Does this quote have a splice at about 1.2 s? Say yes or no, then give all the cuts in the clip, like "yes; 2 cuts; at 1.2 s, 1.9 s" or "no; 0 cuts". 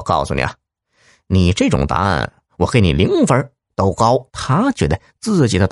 no; 1 cut; at 4.3 s